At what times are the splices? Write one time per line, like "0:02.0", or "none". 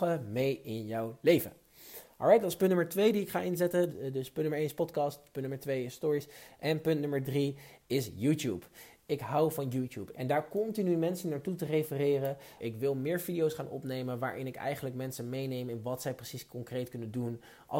0:03.9
0:10.1
0:12.6